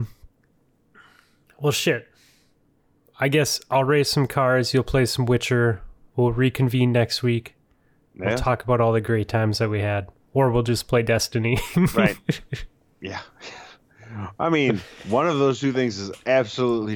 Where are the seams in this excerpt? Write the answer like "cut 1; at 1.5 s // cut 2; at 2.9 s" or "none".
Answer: none